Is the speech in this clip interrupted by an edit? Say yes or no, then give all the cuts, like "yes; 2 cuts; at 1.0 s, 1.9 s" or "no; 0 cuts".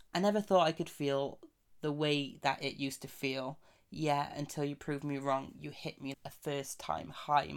yes; 1 cut; at 6.1 s